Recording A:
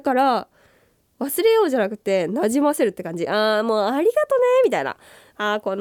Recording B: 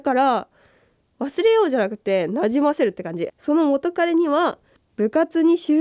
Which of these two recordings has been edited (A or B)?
B